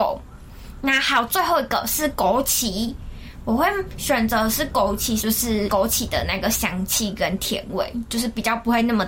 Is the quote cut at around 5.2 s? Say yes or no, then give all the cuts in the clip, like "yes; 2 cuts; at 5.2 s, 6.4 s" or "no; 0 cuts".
yes; 1 cut; at 5.2 s